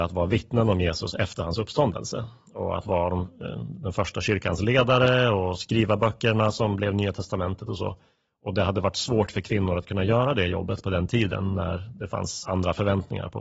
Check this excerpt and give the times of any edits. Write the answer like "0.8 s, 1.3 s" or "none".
none